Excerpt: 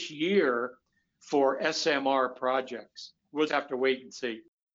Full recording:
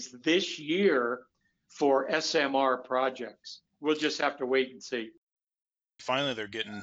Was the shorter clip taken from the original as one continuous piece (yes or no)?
no